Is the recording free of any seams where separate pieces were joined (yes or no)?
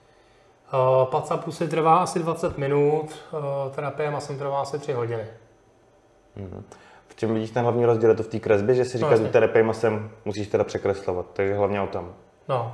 yes